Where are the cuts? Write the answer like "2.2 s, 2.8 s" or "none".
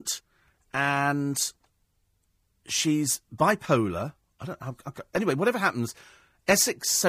none